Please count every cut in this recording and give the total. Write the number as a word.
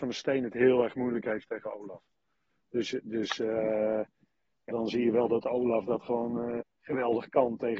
two